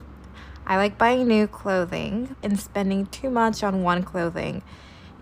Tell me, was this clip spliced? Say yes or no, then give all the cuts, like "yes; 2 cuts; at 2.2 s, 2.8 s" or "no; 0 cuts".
yes; 1 cut; at 2.4 s